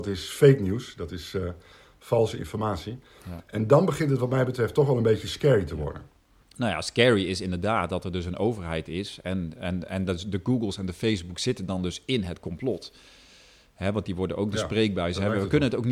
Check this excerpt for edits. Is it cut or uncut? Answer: uncut